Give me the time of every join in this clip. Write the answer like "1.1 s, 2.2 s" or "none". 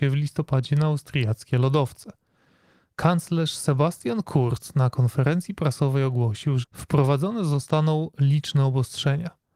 2.9 s, 6.6 s